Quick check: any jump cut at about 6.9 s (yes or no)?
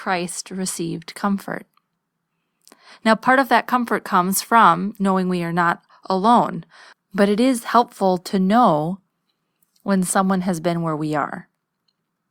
yes